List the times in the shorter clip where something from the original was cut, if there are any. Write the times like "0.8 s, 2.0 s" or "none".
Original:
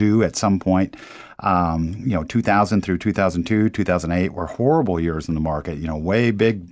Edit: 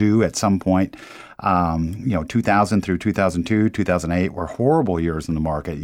none